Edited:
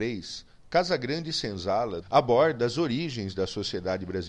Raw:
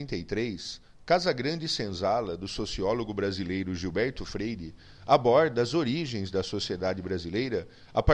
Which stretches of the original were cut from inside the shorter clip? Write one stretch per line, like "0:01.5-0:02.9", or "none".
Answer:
0:02.4-0:05.0